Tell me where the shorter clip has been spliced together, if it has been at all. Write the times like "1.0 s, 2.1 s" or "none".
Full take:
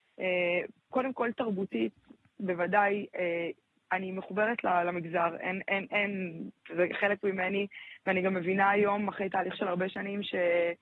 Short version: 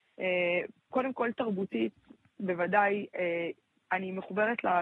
none